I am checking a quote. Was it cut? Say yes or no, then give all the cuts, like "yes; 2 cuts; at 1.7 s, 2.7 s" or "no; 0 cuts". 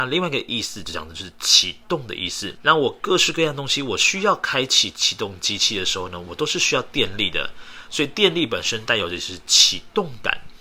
yes; 1 cut; at 2.6 s